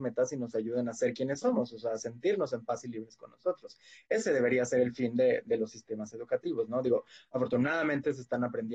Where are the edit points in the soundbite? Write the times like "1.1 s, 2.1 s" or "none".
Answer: none